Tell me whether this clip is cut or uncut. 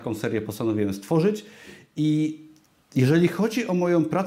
uncut